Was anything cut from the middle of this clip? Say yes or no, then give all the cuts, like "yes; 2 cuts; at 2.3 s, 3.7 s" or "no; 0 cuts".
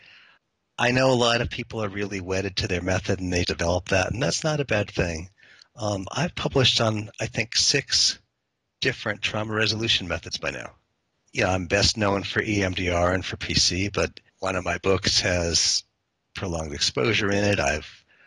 yes; 1 cut; at 3.4 s